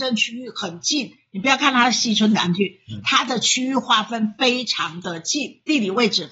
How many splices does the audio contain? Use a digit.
0